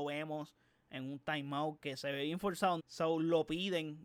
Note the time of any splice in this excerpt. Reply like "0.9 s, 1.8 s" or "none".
2.8 s